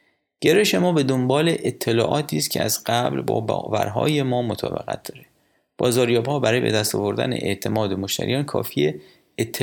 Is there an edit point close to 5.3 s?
no; 0 cuts

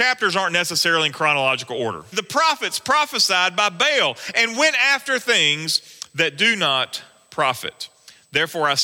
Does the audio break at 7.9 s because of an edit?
no; 1 cut; at 2.1 s

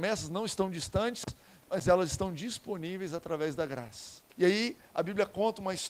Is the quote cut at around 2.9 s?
no; 1 cut; at 4.3 s

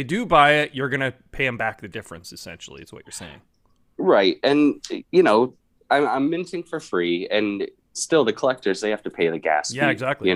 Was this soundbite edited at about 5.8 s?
yes; 1 cut; at 5.8 s

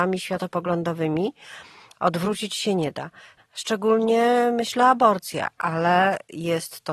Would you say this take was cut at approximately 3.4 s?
yes; 1 cut; at 3.4 s

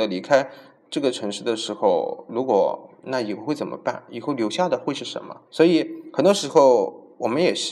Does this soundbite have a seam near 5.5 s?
yes; 1 cut; at 5.5 s

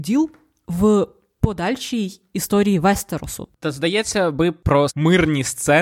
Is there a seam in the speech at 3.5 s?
yes; 2 cuts; at 3.5 s, 4.9 s

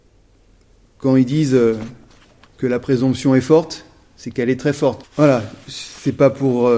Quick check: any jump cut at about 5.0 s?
yes; 1 cut; at 5.0 s

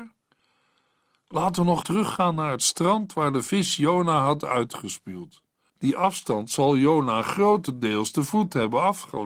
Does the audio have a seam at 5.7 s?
yes; 2 cuts; at 1.8 s, 5.7 s

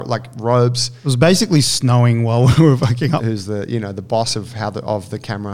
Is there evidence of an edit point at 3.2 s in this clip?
yes; 1 cut; at 3.2 s

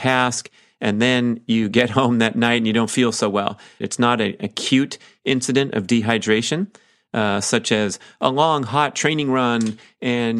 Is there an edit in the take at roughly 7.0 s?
no; 1 cut; at 3.8 s

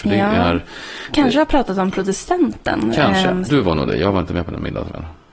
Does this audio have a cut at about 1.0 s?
no; 1 cut; at 3.5 s

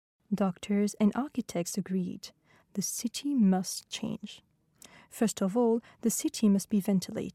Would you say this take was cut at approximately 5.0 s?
no; 1 cut; at 1.0 s

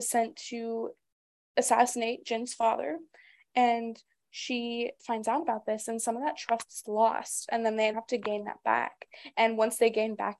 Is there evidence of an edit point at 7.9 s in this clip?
yes; 2 cuts; at 5.0 s, 7.9 s

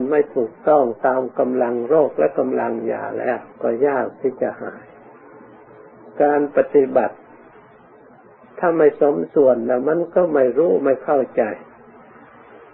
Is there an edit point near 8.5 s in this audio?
no; 1 cut; at 3.5 s

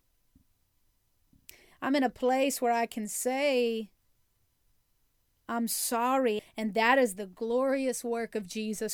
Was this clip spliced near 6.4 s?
yes; 1 cut; at 6.4 s

